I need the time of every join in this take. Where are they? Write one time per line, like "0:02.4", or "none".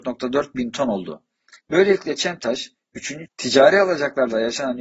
0:01.6
0:03.3